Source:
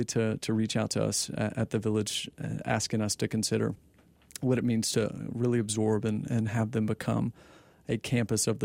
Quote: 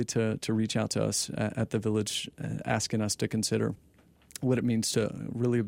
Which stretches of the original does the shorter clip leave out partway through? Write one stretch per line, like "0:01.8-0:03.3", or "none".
none